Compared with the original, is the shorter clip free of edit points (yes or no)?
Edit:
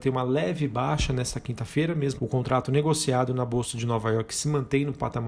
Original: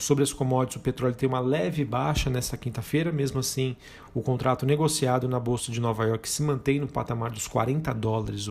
no